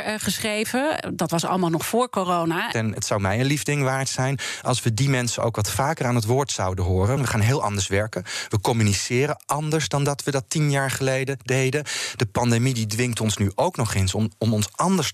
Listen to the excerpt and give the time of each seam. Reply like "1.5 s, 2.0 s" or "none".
2.7 s, 7.2 s